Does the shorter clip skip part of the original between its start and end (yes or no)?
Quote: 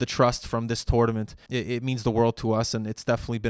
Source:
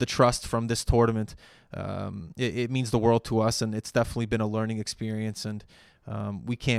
yes